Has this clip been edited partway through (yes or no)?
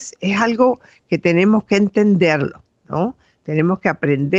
no